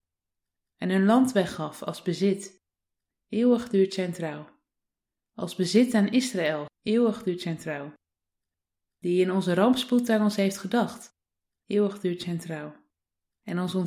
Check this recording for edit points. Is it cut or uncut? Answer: cut